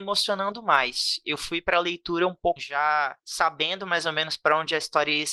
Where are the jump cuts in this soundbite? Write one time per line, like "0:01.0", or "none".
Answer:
0:02.6